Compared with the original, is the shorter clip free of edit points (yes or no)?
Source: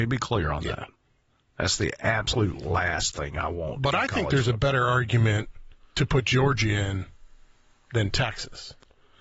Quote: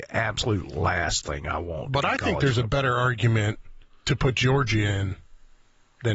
yes